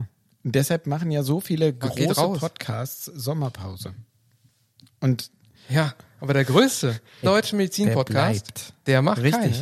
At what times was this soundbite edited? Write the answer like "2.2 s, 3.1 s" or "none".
7.2 s